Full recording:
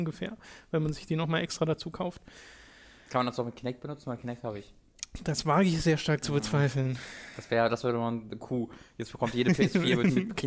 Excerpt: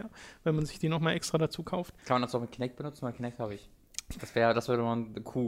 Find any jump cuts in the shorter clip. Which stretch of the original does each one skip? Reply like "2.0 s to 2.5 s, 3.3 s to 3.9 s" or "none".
2.3 s to 3.0 s, 5.2 s to 7.3 s